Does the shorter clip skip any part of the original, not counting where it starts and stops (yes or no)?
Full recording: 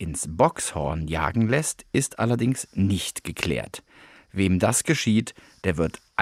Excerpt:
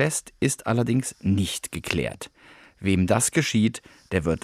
no